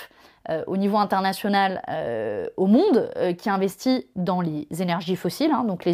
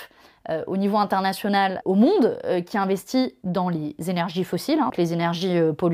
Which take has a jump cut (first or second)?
second